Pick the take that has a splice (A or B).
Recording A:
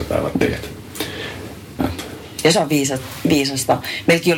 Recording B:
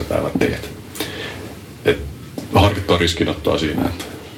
A